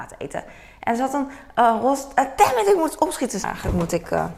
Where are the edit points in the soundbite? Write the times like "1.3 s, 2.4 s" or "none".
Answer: 3.4 s